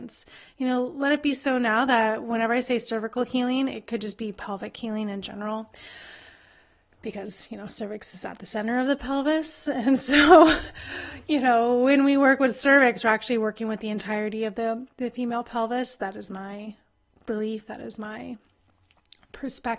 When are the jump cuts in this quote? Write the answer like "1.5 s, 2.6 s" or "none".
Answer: none